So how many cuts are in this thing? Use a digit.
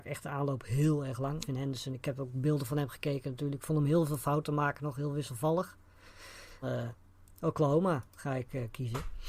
2